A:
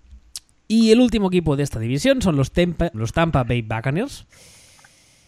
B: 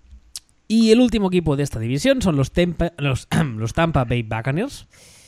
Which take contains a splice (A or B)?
A